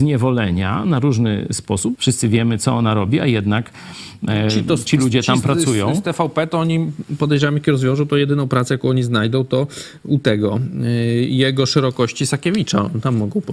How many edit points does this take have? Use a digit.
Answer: 1